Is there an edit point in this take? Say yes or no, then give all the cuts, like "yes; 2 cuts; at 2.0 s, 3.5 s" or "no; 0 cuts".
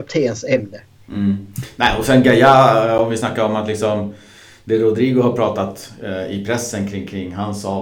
no; 0 cuts